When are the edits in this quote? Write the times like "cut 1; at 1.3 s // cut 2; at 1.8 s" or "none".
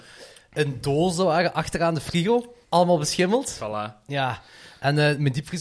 cut 1; at 2.6 s